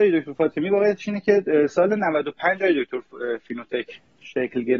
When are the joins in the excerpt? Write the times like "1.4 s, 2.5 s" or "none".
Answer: none

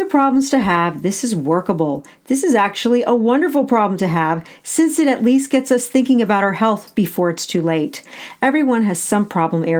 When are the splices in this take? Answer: none

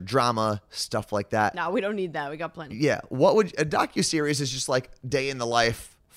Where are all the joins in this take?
none

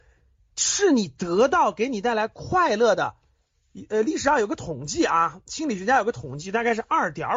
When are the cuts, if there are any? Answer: none

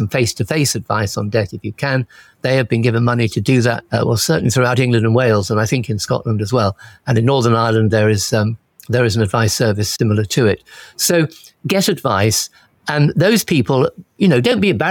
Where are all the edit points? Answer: none

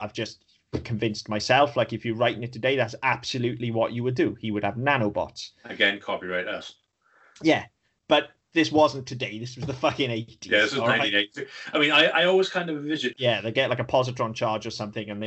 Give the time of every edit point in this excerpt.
13.1 s

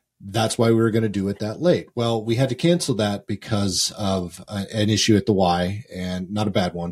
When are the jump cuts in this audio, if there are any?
none

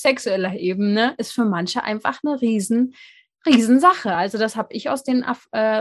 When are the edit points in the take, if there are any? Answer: none

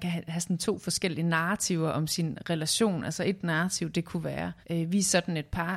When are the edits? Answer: 4.6 s

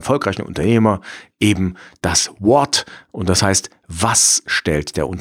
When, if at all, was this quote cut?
none

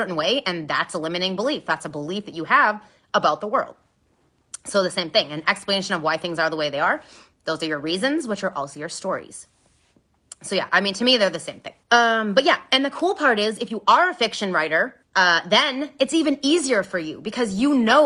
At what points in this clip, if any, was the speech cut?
11.8 s, 15.0 s

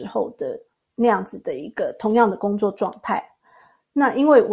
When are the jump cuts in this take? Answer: none

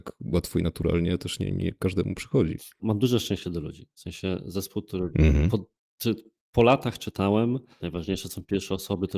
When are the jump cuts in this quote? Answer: 2.8 s, 7.8 s

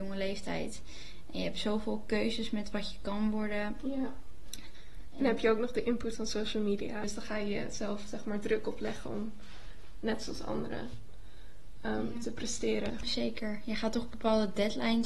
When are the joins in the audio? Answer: 7.0 s, 12.9 s

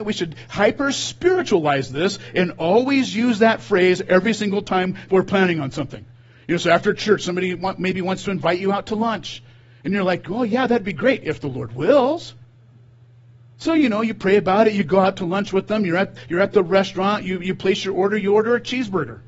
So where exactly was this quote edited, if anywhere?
none

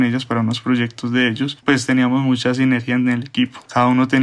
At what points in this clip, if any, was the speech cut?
1.6 s

